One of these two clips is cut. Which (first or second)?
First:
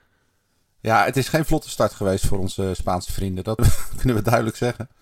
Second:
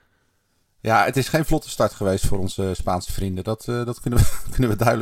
first